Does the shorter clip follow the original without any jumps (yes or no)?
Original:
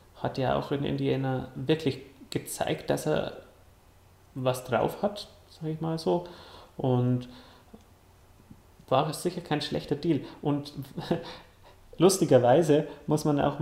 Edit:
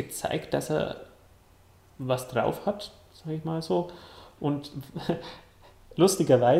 no